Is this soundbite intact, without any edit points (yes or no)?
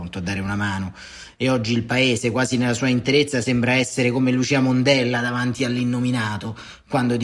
yes